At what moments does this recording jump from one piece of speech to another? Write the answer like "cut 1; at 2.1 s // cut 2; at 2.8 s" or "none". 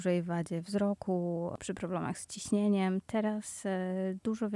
cut 1; at 1.6 s